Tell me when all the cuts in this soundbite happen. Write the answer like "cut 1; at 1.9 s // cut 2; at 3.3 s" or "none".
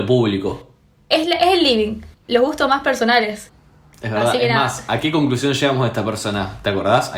cut 1; at 2.2 s